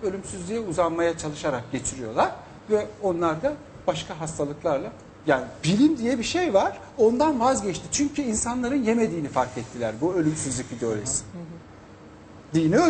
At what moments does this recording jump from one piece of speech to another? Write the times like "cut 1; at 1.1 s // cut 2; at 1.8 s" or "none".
none

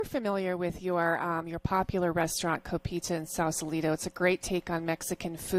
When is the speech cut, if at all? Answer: none

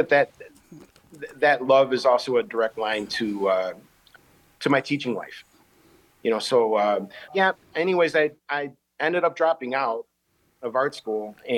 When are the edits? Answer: cut 1; at 7.3 s

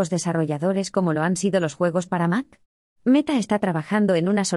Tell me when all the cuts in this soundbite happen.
cut 1; at 3.0 s

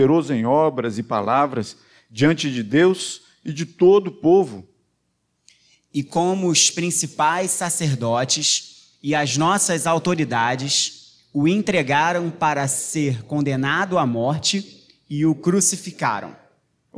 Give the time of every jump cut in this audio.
none

